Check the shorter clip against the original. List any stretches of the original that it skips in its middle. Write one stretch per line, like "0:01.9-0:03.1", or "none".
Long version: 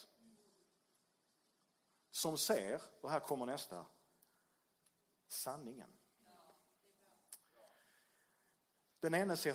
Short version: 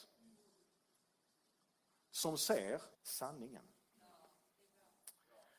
0:02.9-0:05.2